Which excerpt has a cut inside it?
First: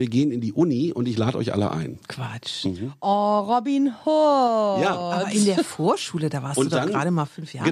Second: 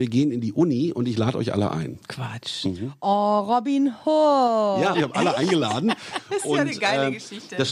second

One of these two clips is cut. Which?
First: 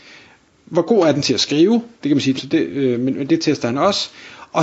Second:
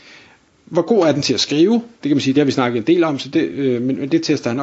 first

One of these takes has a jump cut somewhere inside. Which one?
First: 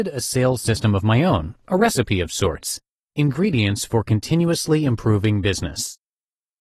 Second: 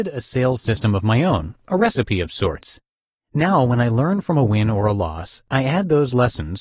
first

